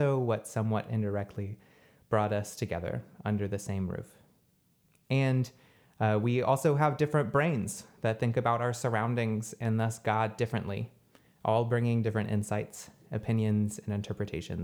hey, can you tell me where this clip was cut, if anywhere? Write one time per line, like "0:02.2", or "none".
none